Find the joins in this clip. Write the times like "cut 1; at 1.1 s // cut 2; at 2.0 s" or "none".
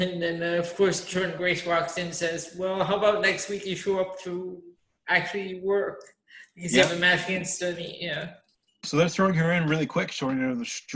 none

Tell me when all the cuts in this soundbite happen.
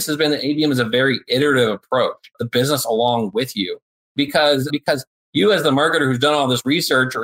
cut 1; at 2.3 s // cut 2; at 4.7 s

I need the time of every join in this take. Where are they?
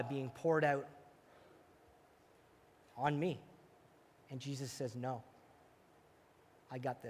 none

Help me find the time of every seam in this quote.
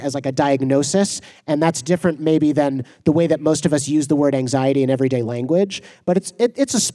none

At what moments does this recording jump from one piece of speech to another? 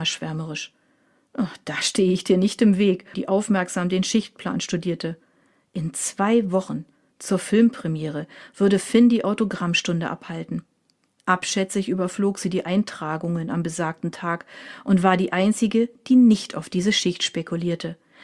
cut 1; at 3.1 s

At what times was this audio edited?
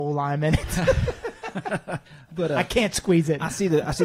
cut 1; at 2.1 s

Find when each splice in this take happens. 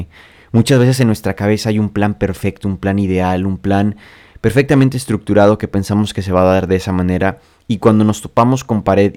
none

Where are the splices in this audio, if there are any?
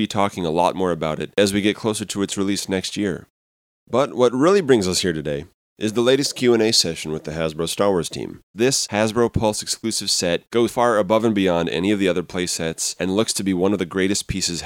cut 1; at 8.5 s // cut 2; at 10.7 s

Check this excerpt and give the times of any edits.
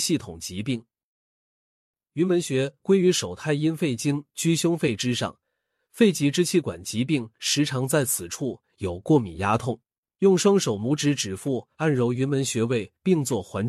cut 1; at 10.0 s

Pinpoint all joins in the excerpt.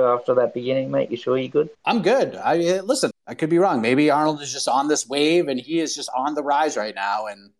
cut 1; at 1.7 s // cut 2; at 3.1 s

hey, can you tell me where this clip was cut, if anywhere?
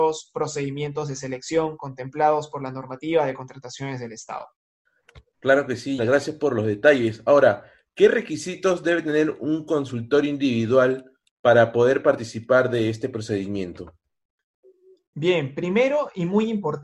cut 1; at 6.0 s

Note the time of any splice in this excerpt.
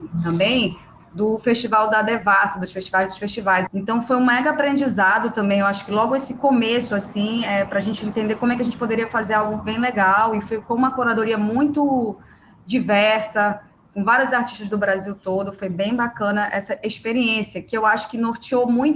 cut 1; at 3.7 s

